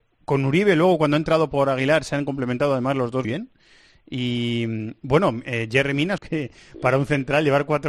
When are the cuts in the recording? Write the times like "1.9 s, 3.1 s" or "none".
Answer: 3.2 s, 6.2 s